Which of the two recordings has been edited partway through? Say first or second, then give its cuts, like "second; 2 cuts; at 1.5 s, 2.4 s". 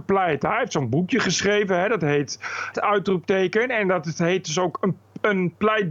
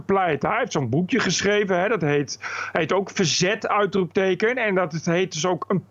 first; 1 cut; at 2.7 s